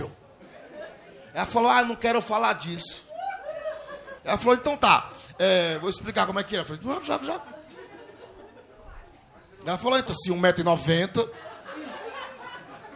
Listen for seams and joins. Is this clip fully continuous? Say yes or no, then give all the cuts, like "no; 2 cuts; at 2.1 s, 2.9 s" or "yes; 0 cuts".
no; 2 cuts; at 4.2 s, 10.1 s